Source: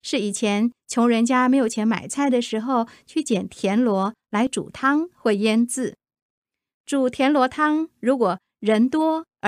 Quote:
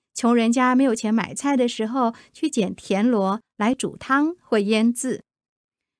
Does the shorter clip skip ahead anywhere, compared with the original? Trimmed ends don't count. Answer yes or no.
no